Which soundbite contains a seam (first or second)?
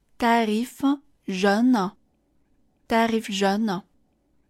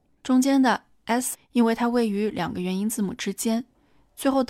second